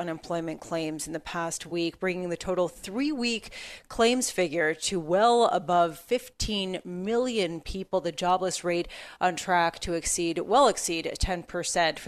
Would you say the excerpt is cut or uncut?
uncut